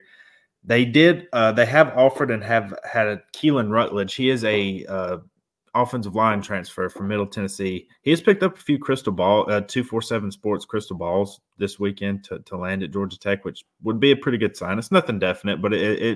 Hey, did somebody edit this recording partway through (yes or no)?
no